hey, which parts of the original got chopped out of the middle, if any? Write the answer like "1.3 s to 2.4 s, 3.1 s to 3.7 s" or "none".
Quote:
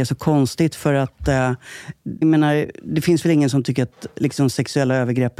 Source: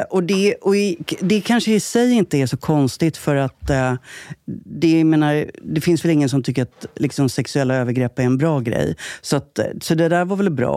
4.6 s to 5.0 s